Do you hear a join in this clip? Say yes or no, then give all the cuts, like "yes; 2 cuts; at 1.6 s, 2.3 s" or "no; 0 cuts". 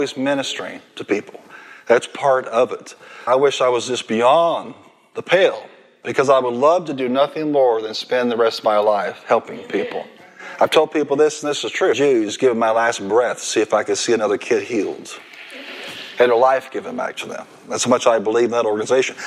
yes; 2 cuts; at 3.3 s, 11.9 s